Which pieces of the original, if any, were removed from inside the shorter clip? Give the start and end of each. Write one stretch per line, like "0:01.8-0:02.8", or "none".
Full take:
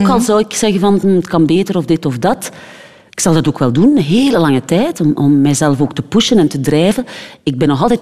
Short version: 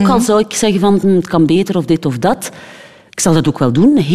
none